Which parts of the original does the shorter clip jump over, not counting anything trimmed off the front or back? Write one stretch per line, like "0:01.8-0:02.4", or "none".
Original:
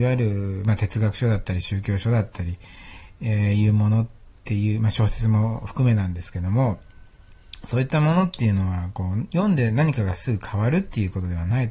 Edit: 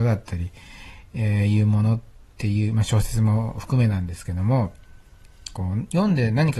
0:07.6-0:08.9

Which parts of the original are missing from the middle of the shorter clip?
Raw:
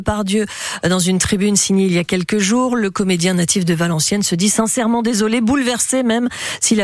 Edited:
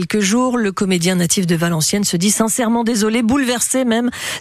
none

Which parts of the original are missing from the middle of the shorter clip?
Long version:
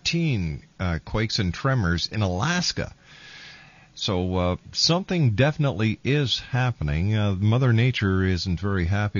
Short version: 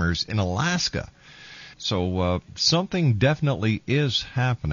0:03.6-0:03.9

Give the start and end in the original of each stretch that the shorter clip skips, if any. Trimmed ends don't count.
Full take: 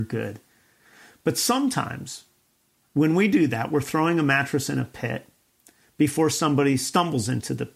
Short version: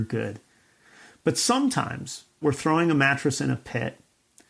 0:02.4-0:03.7

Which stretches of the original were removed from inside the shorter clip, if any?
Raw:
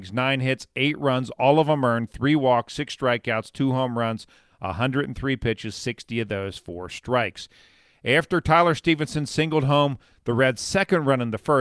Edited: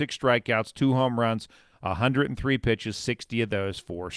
none

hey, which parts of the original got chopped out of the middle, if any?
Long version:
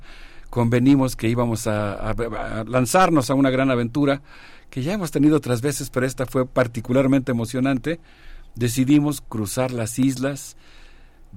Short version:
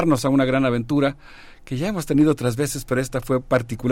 none

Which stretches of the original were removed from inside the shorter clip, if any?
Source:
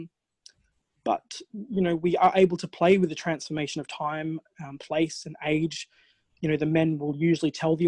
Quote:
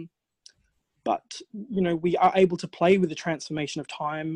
none

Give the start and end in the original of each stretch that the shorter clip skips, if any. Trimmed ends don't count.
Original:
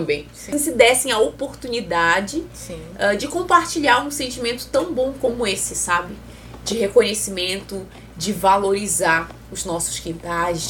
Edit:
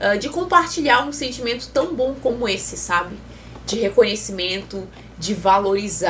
none

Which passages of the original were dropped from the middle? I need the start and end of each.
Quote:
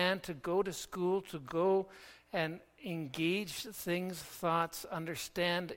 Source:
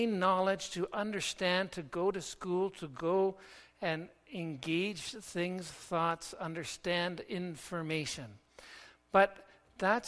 none

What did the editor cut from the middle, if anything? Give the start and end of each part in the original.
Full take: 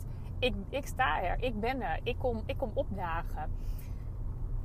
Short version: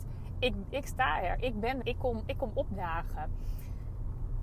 0:01.8-0:02.0

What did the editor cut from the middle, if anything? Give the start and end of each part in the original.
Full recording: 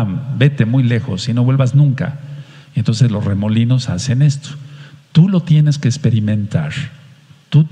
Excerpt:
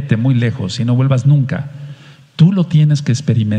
0:02.7-0:05.0

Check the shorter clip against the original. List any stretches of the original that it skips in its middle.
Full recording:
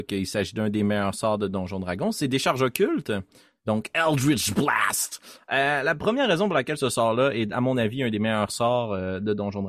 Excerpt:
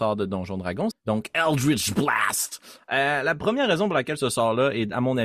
0:02.1-0:03.5

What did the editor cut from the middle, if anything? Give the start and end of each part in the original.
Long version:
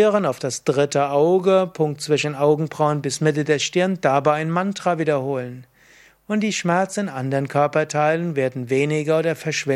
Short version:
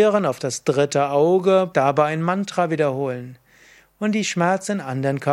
0:01.7-0:04.0

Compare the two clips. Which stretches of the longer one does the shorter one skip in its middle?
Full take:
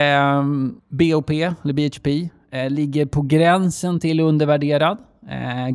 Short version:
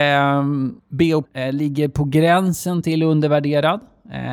0:01.2-0:02.4

